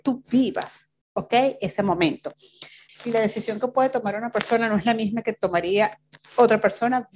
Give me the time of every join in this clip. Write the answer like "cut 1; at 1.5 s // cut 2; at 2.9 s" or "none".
cut 1; at 2.9 s